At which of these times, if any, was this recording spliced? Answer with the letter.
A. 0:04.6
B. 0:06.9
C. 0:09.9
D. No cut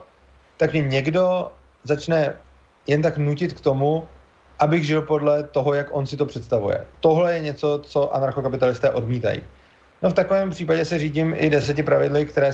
C